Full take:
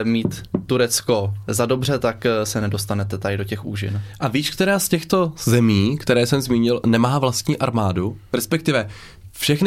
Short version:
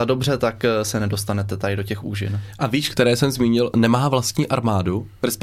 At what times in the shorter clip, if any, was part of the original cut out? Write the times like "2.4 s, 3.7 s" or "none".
2.9 s